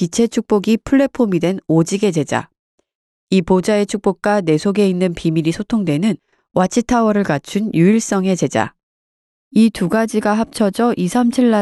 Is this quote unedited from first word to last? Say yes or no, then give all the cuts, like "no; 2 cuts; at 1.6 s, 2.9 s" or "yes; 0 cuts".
yes; 0 cuts